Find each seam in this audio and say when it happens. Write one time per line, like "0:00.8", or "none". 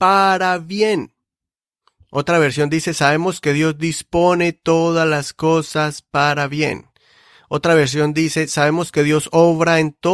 none